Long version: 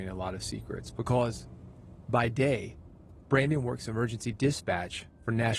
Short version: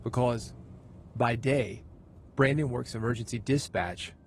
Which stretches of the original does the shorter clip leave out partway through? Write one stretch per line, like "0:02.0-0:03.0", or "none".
none